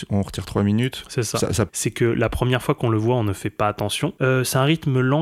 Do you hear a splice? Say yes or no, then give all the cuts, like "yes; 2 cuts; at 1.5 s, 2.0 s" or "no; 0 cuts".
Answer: yes; 2 cuts; at 1.7 s, 4.2 s